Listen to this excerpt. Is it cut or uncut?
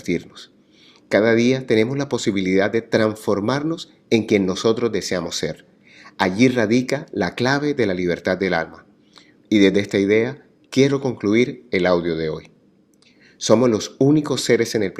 cut